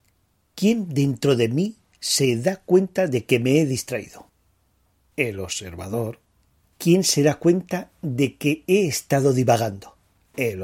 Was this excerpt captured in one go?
yes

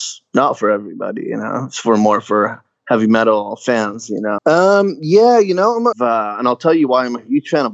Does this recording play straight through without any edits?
no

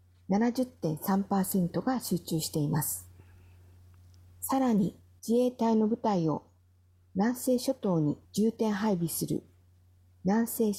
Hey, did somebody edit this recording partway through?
yes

